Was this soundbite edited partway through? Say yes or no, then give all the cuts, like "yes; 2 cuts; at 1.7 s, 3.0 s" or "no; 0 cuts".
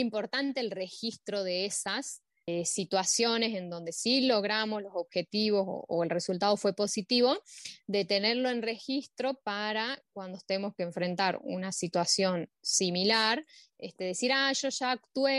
no; 0 cuts